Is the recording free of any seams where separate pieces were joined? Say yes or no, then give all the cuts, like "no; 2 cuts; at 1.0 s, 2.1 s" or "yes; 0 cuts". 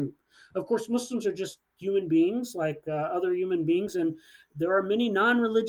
yes; 0 cuts